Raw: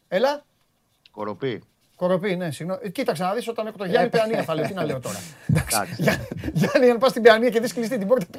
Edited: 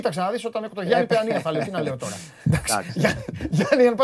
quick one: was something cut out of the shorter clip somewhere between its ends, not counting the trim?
no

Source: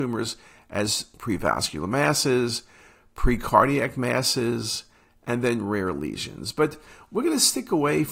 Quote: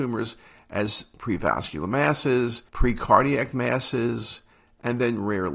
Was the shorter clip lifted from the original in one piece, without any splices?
no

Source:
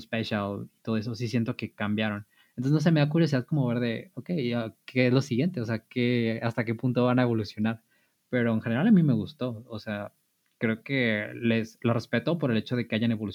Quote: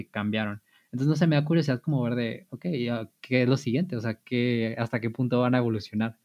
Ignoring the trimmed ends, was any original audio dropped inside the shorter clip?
no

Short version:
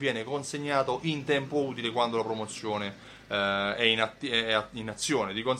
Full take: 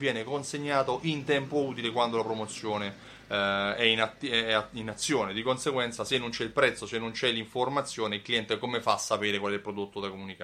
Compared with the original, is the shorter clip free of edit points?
yes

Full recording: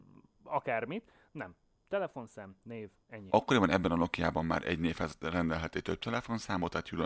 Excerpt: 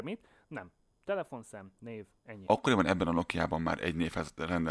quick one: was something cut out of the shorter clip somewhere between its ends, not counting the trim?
no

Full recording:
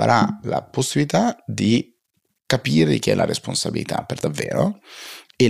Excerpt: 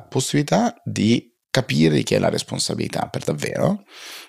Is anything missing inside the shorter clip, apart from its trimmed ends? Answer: yes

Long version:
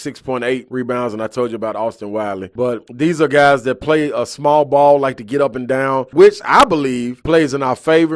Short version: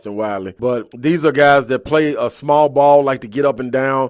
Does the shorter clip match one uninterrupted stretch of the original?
yes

